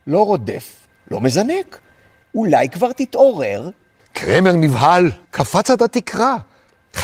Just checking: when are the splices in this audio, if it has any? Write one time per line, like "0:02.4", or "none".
0:02.2
0:04.0
0:05.2